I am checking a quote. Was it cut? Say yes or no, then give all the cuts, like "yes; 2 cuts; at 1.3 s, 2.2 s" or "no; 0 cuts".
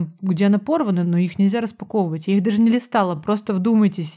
no; 0 cuts